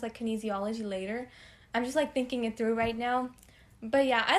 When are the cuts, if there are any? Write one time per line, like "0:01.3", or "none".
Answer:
none

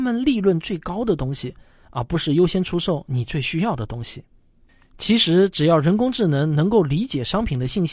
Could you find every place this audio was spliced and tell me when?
none

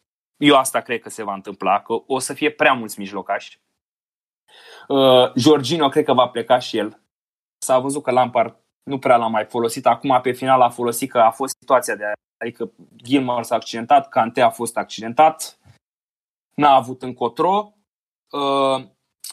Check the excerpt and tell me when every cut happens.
none

